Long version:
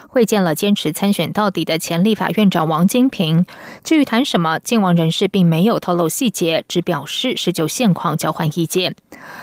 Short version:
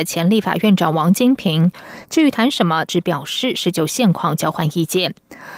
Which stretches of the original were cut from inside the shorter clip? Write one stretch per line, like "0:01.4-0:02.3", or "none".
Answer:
0:04.6-0:06.7